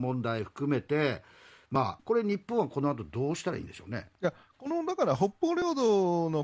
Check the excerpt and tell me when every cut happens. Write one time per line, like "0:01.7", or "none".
0:02.0
0:04.1

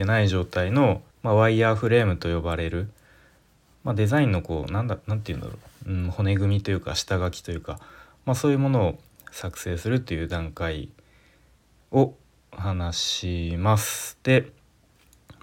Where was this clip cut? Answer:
0:01.1

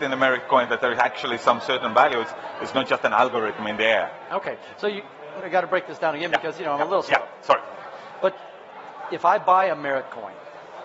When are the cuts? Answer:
0:05.4

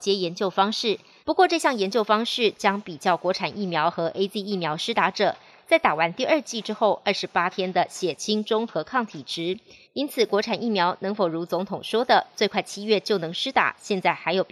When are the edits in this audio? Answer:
0:01.2
0:09.8

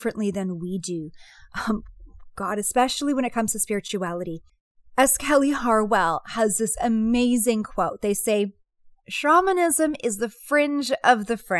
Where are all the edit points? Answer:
0:09.0

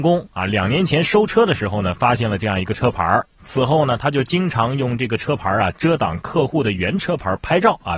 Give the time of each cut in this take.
0:03.3

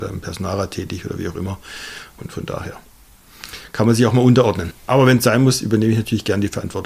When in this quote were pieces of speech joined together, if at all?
0:02.1
0:04.9

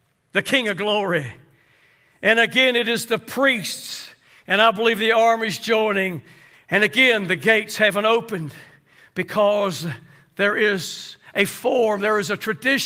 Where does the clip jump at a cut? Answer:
0:06.5

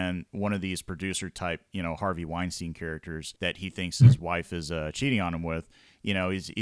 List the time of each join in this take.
0:03.4

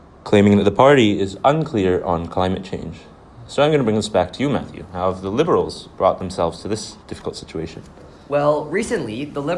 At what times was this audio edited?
none

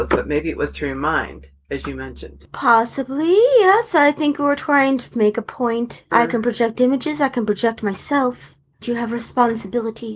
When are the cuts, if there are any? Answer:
0:06.1
0:08.7

